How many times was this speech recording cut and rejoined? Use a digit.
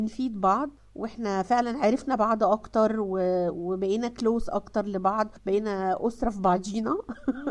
0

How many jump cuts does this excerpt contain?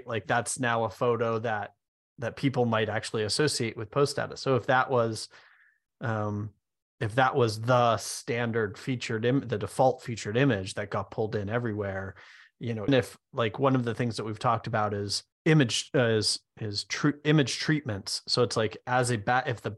2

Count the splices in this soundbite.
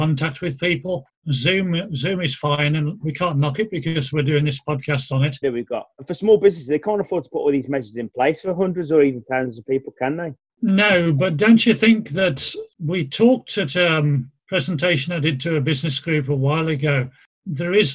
2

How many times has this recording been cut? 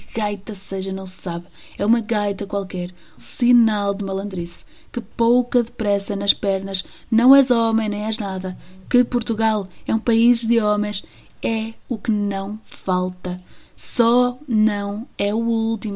1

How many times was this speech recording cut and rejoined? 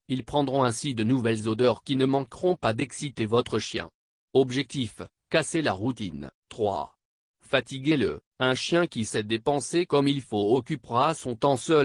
2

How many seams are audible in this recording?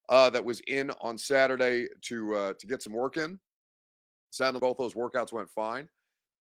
1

